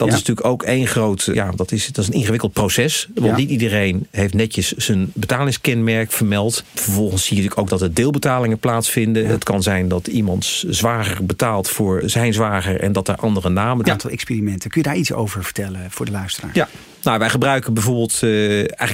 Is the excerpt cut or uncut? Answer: cut